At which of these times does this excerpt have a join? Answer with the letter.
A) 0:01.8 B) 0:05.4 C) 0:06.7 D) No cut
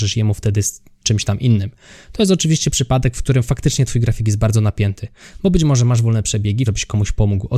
C